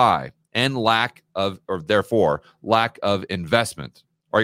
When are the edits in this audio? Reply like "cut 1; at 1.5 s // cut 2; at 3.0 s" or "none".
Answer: none

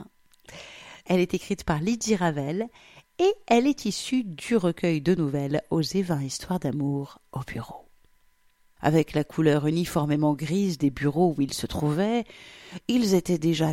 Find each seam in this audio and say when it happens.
cut 1; at 1.0 s // cut 2; at 8.8 s

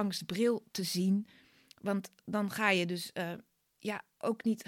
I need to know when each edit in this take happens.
none

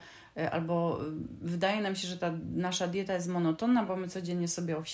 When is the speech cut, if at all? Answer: none

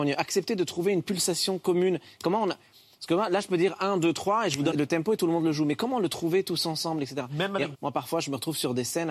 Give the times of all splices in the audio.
cut 1; at 4.7 s // cut 2; at 7.7 s

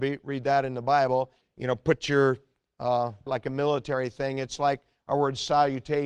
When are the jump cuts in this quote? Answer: cut 1; at 1.4 s // cut 2; at 3.3 s

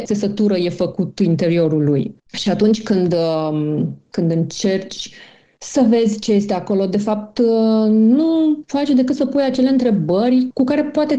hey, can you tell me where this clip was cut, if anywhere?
none

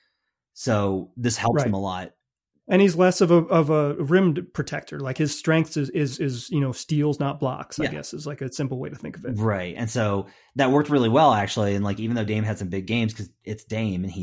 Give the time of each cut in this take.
none

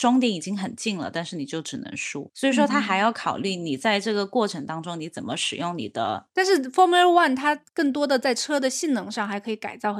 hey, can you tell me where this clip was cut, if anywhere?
none

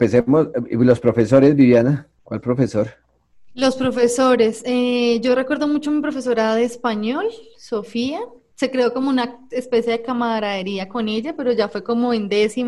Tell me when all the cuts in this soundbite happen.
none

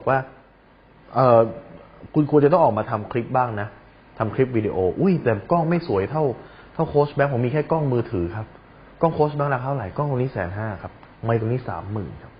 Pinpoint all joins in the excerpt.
none

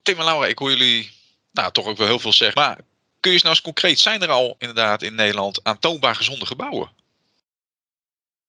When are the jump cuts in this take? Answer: cut 1; at 2.5 s

